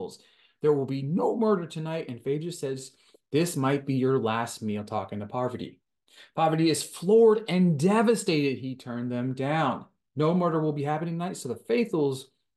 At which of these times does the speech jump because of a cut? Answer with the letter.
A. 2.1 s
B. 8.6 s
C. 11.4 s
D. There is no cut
D